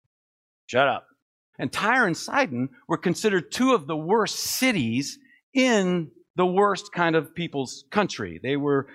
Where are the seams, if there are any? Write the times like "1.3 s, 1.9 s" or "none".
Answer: 1.5 s